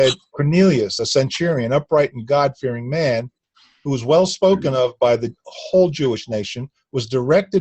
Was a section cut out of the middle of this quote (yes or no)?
no